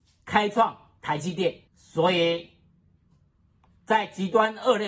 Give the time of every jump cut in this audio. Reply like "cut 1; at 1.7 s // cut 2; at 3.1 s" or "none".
cut 1; at 1.7 s